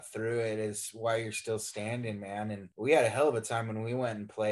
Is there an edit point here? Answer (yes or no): yes